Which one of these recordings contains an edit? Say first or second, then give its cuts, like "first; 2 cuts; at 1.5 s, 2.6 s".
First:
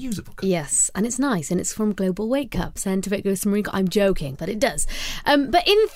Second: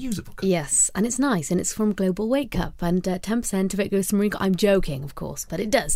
first; 2 cuts; at 2.8 s, 4.3 s